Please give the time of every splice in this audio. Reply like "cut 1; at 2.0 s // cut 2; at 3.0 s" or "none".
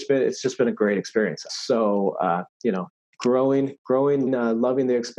cut 1; at 1.5 s // cut 2; at 4.3 s

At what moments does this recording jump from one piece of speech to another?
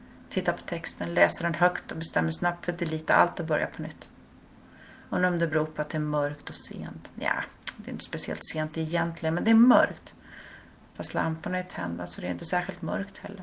none

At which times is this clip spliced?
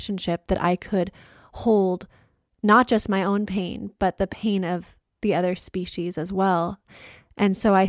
none

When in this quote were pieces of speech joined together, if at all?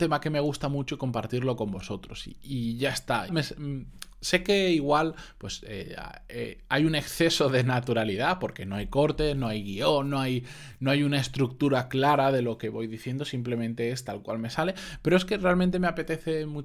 cut 1; at 3.3 s

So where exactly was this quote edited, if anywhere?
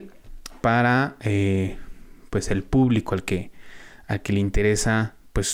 none

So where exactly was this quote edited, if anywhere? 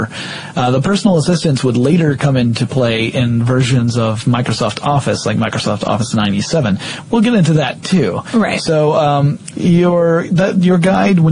cut 1; at 9.5 s

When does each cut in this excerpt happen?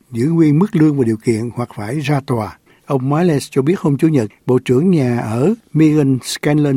cut 1; at 2.7 s

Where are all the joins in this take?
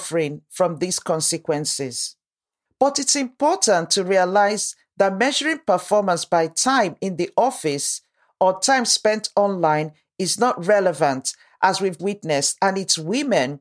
cut 1; at 2.7 s // cut 2; at 12.0 s

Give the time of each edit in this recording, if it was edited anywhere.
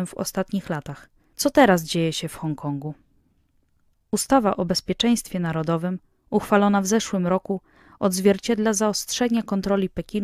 cut 1; at 1.3 s

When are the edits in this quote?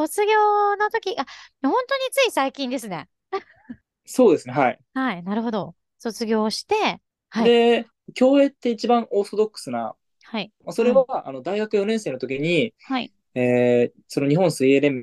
cut 1; at 10.6 s

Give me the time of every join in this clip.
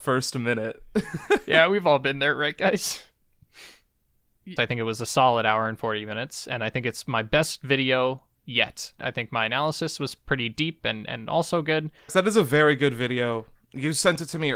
cut 1; at 4.6 s // cut 2; at 9.0 s // cut 3; at 12.1 s

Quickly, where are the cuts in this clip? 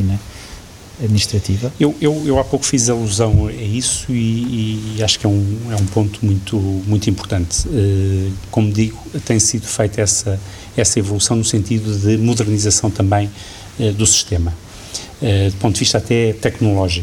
none

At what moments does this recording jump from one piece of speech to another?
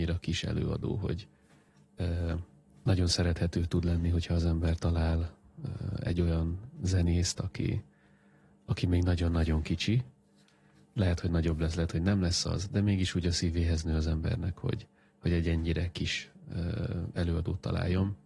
none

